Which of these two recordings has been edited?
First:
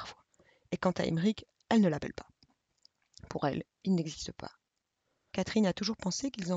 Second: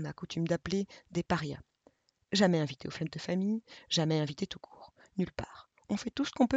first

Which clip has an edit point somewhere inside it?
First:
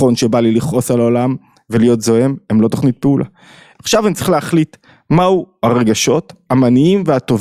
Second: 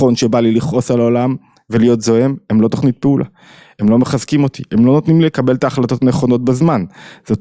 first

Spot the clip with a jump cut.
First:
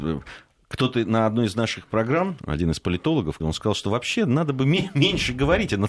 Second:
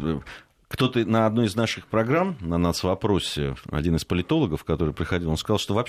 first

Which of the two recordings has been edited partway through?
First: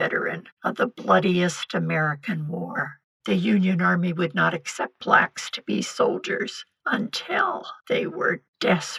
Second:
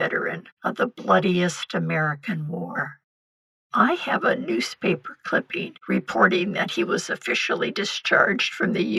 first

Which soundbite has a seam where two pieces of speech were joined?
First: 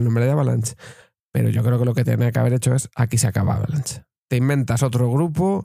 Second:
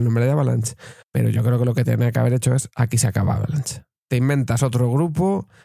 second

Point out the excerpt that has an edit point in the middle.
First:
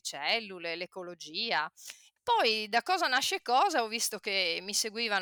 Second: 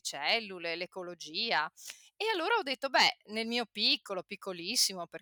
first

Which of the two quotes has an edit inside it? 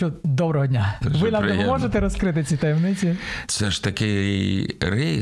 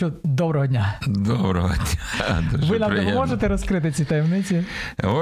first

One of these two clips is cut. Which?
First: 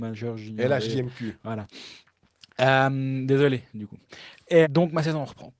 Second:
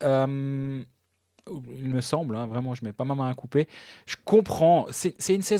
first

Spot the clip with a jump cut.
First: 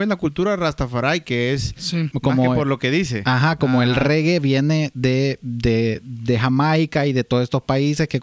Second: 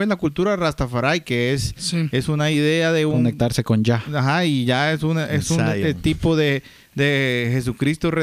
first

